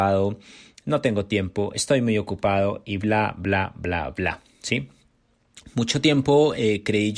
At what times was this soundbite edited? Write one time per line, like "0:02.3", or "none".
none